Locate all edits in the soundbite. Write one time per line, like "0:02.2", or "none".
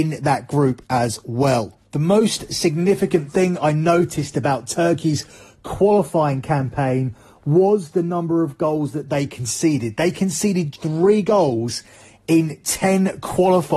0:10.7